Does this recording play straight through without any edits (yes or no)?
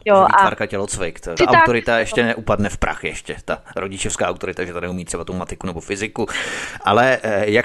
yes